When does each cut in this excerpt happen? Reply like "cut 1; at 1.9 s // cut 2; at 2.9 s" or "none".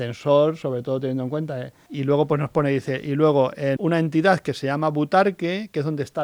cut 1; at 1.9 s // cut 2; at 3.8 s